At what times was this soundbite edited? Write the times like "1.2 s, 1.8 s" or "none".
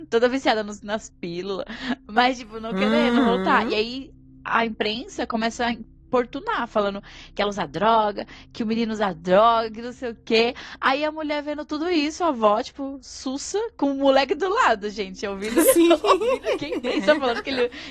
none